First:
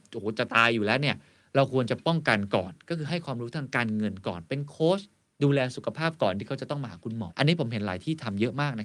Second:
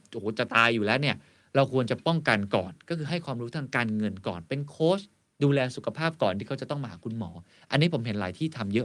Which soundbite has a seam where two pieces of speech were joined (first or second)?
first